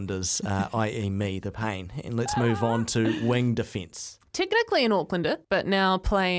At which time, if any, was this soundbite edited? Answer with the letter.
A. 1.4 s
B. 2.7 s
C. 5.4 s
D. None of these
C